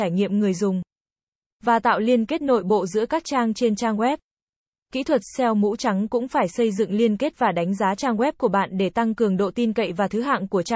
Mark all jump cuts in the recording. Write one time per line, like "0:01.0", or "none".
none